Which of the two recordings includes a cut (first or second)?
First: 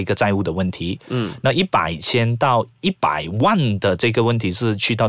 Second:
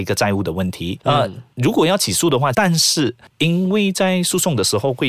second